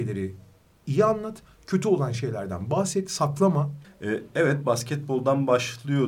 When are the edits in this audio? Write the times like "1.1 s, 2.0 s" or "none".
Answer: 3.8 s